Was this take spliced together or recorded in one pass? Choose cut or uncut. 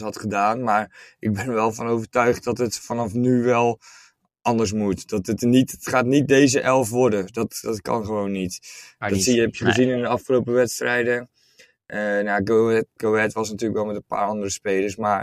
uncut